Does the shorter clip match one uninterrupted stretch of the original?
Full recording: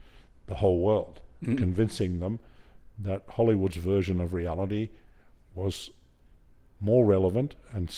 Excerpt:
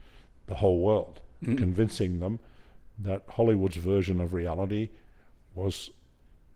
yes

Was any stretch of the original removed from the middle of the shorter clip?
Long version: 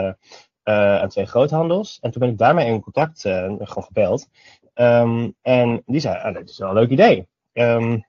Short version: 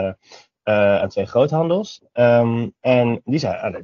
yes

